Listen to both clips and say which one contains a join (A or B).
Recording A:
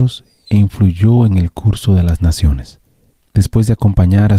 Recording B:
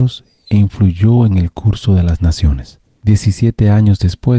B